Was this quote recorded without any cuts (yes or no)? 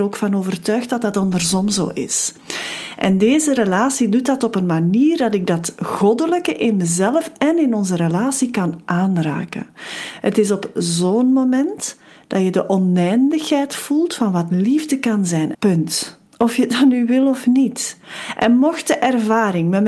no